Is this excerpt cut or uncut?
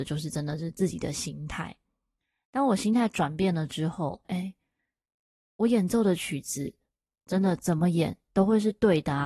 cut